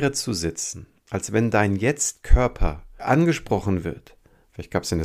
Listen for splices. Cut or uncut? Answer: cut